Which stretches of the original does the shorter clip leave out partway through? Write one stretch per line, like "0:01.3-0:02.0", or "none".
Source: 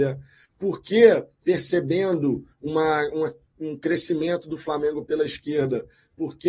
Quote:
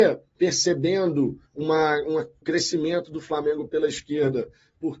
0:03.5-0:03.8